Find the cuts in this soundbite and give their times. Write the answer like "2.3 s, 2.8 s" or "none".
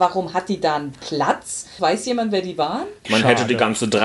1.8 s, 3.0 s